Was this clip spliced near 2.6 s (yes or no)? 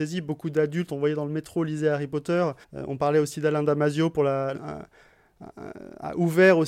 yes